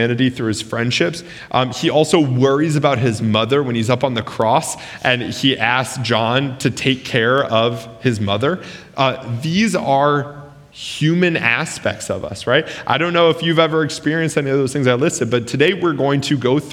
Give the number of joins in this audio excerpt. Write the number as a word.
zero